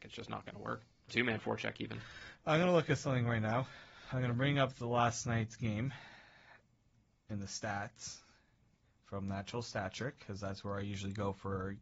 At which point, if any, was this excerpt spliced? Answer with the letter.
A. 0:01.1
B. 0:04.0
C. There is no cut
A